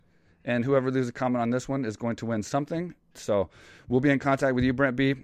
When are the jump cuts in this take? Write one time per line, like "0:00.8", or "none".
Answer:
0:03.1